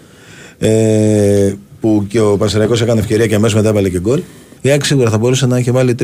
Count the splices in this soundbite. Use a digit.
1